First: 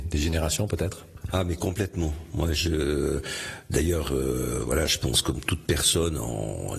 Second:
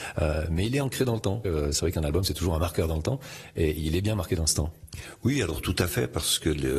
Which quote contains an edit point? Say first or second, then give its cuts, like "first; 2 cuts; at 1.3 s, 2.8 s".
second; 1 cut; at 1.4 s